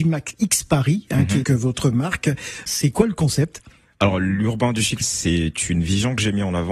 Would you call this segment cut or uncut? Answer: cut